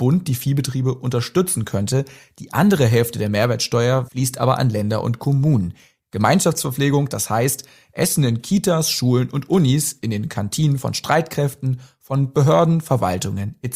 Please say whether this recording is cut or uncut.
cut